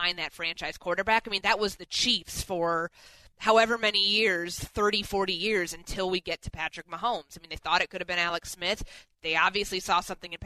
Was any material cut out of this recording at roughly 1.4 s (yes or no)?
no